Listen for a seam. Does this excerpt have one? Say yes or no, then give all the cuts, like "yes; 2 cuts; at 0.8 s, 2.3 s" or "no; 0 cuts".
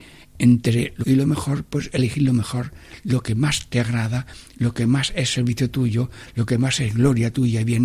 yes; 1 cut; at 1.0 s